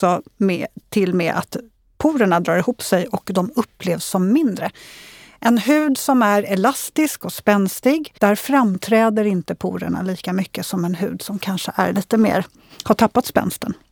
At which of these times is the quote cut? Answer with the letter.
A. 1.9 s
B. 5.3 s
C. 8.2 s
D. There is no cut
C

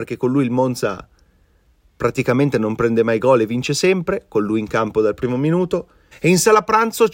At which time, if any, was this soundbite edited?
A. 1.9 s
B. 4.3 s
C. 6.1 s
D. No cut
C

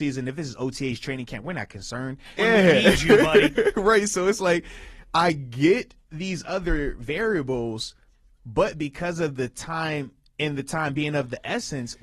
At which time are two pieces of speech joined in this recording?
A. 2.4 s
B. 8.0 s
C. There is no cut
A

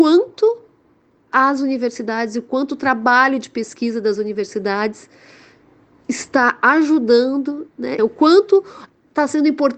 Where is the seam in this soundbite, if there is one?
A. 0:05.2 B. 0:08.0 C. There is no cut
B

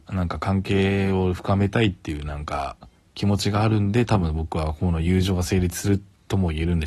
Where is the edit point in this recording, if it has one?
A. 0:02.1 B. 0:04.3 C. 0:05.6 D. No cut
D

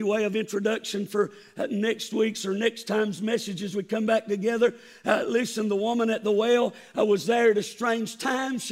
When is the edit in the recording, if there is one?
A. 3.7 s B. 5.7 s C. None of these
C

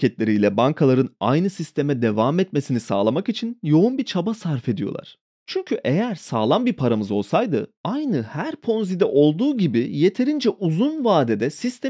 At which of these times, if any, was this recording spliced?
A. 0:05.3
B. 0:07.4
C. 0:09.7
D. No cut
A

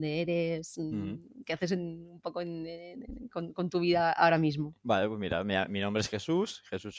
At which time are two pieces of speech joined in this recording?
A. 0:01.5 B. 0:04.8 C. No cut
B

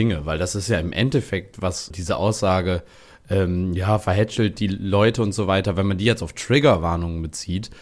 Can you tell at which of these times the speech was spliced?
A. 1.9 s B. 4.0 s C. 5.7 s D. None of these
A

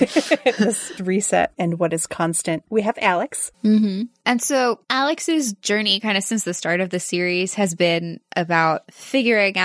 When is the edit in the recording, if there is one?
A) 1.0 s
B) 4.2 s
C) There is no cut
A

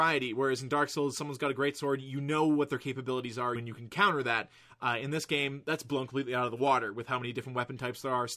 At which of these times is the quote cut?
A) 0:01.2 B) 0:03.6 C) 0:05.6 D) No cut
B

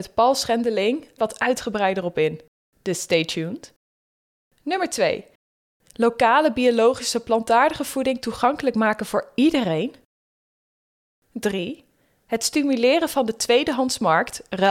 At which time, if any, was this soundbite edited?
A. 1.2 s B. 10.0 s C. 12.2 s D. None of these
A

